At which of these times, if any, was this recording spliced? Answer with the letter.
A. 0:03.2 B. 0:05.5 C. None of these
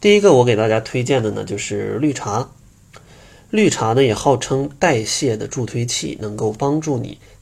C